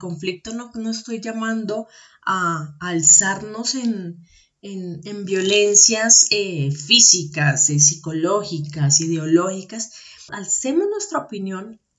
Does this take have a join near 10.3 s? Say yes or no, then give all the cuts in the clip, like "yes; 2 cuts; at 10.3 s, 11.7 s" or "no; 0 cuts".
yes; 1 cut; at 10.3 s